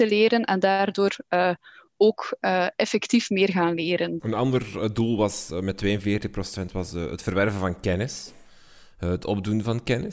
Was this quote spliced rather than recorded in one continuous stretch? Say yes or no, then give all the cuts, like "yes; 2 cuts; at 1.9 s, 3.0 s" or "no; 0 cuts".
yes; 1 cut; at 4.2 s